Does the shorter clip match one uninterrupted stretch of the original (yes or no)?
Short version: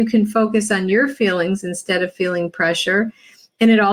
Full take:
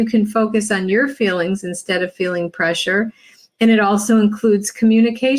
yes